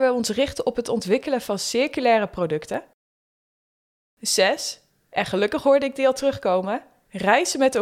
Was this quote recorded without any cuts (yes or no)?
yes